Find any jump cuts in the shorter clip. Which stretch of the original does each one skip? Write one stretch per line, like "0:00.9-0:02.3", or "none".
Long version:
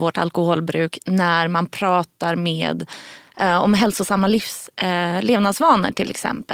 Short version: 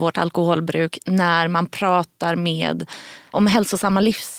0:03.3-0:03.6